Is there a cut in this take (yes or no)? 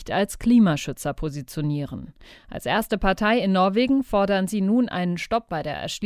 no